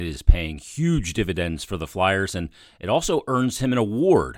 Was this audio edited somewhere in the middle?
no; 0 cuts

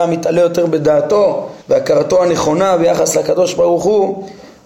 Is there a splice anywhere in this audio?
yes; 1 cut; at 1.6 s

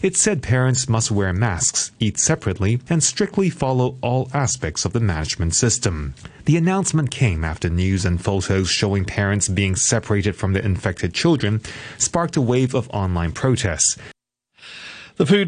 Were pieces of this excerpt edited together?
yes; 1 cut; at 2.9 s

